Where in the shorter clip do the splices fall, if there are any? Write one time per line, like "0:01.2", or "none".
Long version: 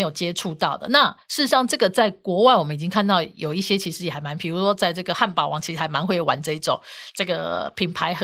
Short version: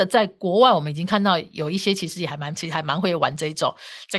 0:02.5